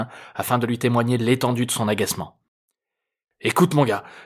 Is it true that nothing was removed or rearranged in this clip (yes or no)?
yes